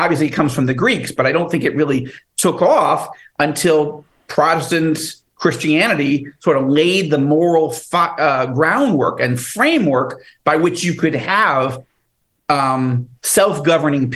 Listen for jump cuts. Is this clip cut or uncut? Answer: uncut